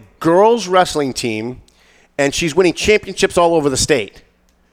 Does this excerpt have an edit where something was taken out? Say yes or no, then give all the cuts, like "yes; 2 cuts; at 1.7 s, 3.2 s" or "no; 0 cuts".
no; 0 cuts